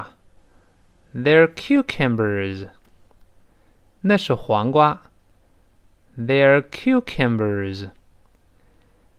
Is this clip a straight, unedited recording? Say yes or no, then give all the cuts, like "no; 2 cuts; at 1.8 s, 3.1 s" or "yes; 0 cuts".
yes; 0 cuts